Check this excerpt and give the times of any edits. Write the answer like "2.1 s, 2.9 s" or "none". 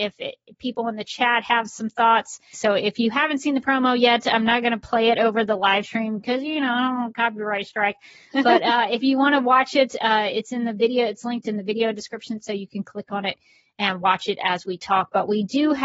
2.5 s